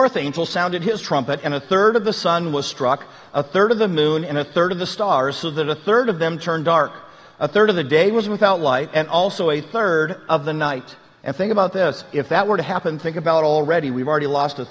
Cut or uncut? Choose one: cut